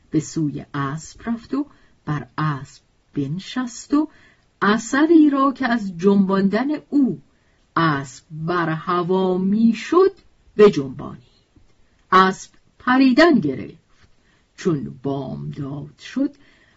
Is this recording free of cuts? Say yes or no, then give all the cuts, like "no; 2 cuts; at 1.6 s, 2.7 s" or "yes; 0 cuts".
yes; 0 cuts